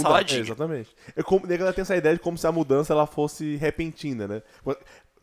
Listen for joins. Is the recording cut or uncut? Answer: uncut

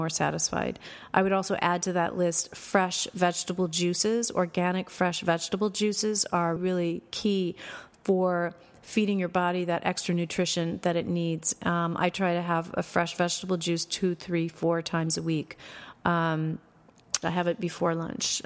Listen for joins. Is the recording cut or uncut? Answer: cut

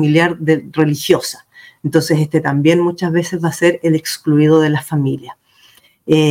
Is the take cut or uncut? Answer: uncut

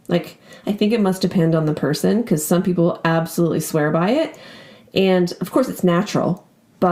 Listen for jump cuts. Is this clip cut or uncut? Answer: uncut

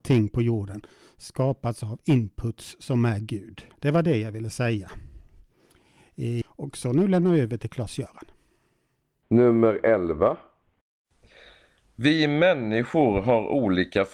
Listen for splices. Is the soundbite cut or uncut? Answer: cut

